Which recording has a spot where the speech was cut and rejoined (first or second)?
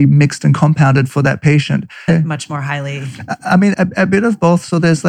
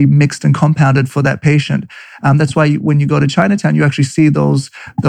first